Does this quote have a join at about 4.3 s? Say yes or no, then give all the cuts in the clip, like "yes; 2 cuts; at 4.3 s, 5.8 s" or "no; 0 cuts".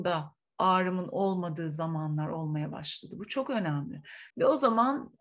yes; 1 cut; at 4.3 s